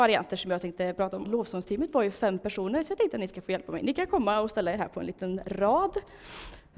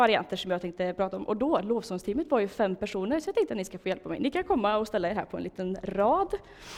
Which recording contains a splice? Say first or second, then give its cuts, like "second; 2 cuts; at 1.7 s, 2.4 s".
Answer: first; 1 cut; at 1.2 s